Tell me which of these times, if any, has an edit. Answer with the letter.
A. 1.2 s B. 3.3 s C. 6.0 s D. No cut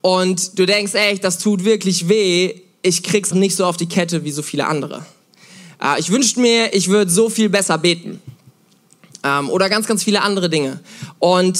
B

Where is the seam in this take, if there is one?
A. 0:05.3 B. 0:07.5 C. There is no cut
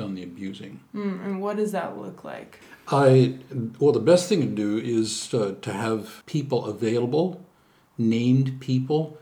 C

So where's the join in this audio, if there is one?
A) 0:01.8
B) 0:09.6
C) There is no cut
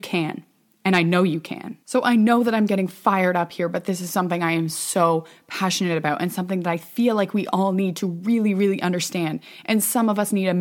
A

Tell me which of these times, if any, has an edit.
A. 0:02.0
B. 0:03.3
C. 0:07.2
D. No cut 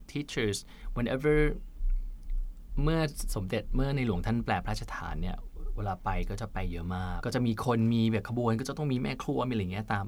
C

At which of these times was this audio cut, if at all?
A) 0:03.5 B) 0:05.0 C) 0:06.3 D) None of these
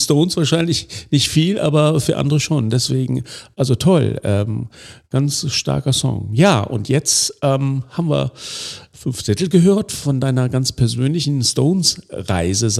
D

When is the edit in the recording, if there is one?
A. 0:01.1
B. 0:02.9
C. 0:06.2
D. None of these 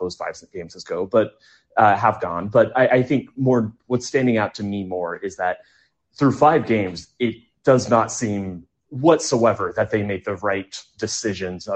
B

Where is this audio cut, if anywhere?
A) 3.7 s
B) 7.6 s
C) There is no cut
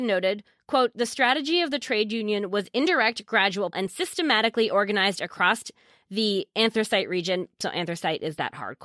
A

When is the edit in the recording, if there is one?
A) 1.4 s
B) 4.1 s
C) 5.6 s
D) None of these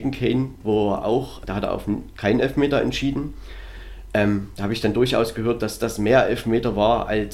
A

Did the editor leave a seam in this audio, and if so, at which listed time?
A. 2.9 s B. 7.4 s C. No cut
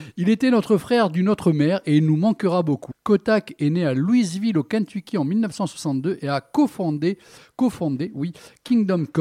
A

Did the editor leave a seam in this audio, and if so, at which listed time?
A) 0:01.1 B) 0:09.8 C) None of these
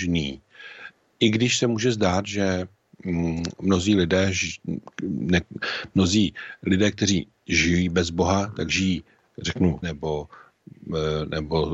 B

